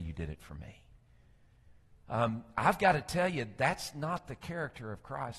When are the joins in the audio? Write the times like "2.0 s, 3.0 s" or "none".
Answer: 2.0 s